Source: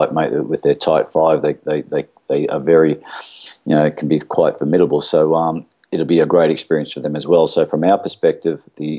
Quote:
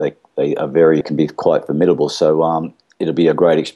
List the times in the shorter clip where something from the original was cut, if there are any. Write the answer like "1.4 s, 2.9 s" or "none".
1.0 s